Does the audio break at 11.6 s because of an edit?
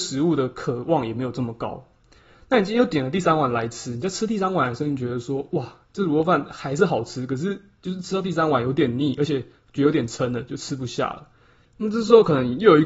yes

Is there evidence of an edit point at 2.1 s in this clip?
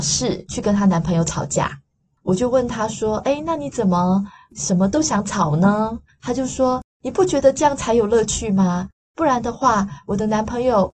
no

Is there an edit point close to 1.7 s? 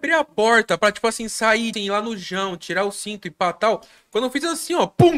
yes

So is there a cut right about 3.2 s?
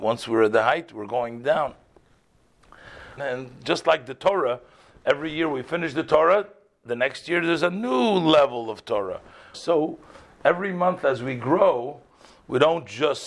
yes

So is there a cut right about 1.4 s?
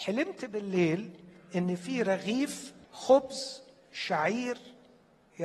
no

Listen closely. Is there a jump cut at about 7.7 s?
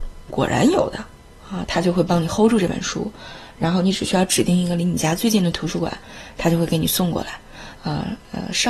yes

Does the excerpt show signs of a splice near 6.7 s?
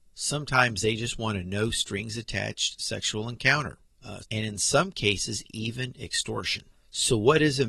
yes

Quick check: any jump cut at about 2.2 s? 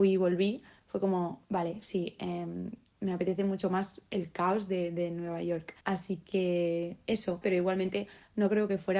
no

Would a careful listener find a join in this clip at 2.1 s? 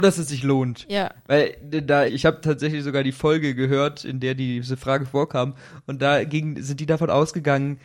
yes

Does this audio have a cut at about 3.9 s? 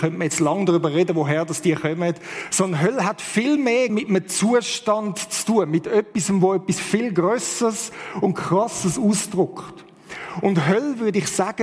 yes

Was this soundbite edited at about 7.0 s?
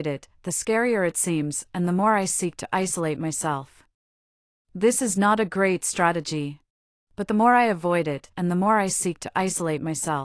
yes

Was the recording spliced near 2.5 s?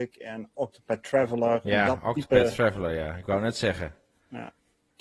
no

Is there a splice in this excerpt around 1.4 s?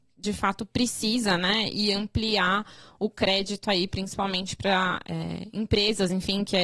no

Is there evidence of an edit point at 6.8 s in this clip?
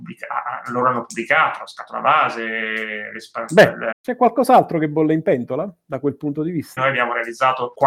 yes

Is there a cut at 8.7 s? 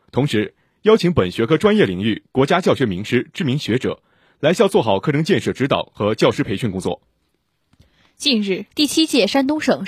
yes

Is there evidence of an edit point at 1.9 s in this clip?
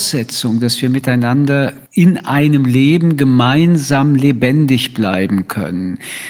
yes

